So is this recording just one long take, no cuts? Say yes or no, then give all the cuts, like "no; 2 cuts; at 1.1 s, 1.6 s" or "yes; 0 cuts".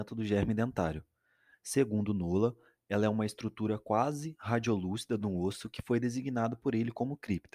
yes; 0 cuts